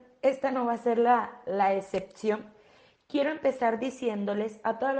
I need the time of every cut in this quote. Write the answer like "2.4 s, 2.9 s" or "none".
none

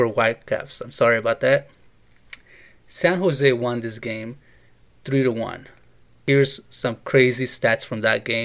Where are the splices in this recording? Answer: none

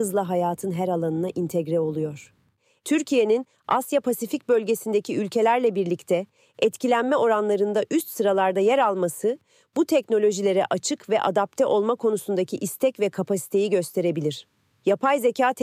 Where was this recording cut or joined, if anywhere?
none

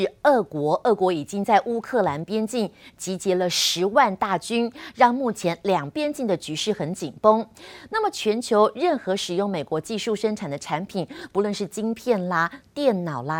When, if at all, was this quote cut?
5.9 s, 7.9 s

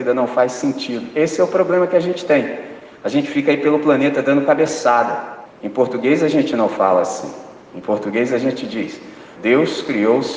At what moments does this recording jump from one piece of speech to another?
5.5 s, 9.4 s

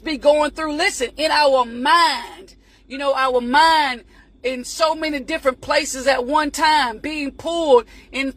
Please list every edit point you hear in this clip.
none

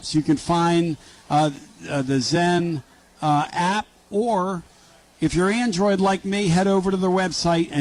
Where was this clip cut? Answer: none

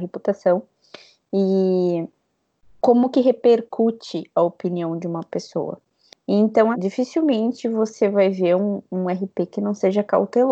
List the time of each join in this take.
6.7 s

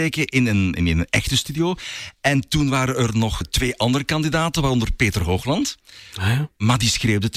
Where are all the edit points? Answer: 3.4 s

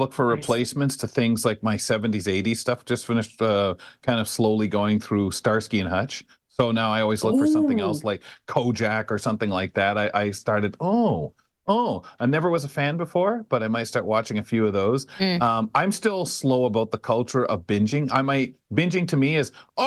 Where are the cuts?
none

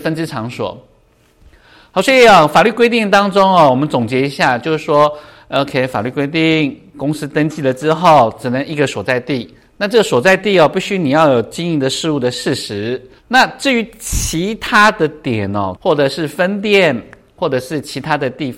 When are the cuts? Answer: 13.2 s, 15.8 s

